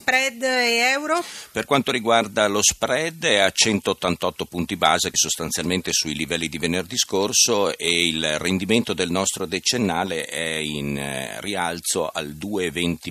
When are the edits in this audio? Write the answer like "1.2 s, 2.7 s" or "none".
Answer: 5.1 s